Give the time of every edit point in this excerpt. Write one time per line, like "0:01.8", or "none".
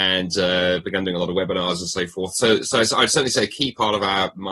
none